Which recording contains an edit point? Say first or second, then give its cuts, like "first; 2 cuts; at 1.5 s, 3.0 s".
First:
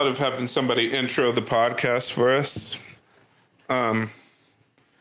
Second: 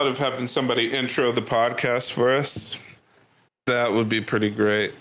second; 1 cut; at 3.5 s